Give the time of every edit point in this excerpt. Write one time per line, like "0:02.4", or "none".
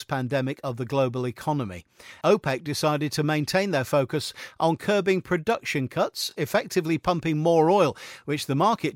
none